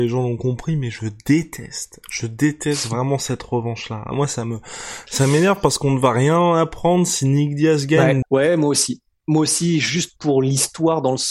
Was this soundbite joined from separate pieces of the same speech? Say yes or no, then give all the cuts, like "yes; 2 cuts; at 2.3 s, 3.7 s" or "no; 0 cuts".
yes; 1 cut; at 8.2 s